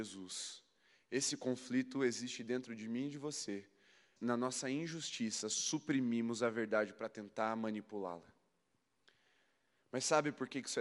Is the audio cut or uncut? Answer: cut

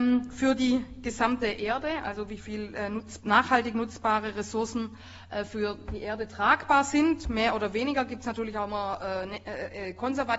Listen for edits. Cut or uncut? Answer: uncut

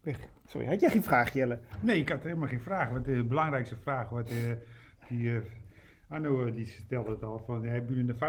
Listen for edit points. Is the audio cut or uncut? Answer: uncut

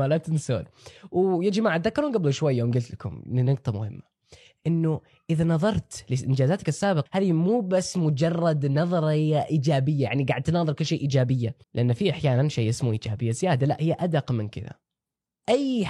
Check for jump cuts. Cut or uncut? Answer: cut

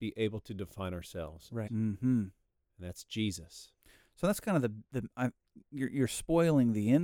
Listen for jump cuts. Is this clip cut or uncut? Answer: cut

